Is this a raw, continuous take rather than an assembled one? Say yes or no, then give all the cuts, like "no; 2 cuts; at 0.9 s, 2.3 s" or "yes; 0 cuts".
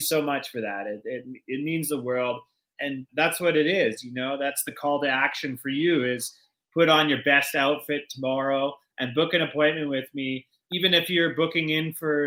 no; 1 cut; at 6.5 s